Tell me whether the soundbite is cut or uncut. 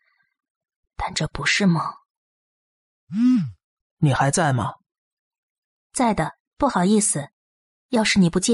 uncut